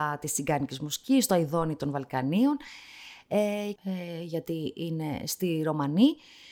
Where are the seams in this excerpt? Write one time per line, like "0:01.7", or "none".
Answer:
0:03.8